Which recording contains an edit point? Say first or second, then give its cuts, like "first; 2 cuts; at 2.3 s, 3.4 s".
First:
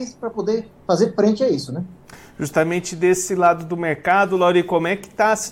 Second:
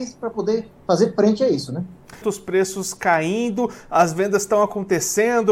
second; 1 cut; at 2.2 s